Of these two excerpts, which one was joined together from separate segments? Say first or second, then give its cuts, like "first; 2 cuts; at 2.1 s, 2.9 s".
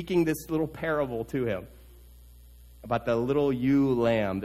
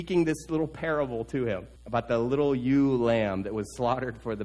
second; 1 cut; at 1.8 s